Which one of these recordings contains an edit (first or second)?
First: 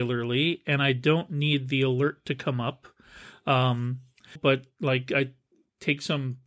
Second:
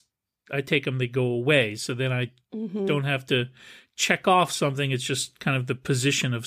first